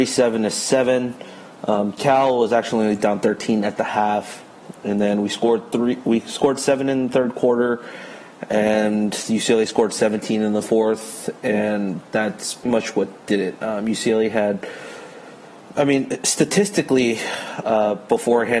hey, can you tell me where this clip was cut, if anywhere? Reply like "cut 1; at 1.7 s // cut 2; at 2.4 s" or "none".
cut 1; at 12.7 s